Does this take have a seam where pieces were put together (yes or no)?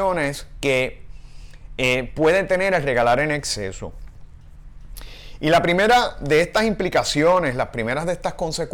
no